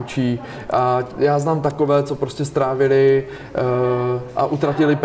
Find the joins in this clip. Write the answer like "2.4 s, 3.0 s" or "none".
1.1 s